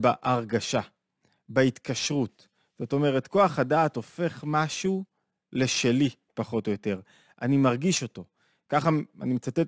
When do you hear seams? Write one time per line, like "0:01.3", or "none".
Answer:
none